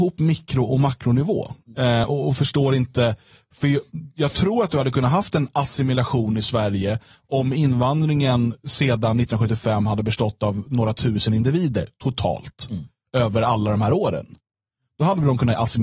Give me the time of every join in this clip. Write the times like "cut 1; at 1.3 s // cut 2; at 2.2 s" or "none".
none